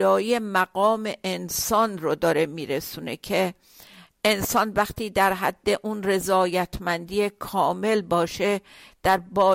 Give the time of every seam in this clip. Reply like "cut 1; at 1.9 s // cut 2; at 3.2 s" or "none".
none